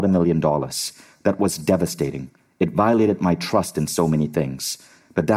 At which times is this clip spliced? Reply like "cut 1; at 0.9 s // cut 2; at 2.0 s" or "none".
none